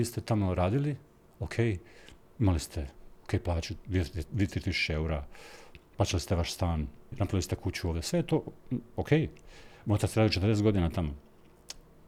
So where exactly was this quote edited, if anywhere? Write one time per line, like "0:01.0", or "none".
0:07.1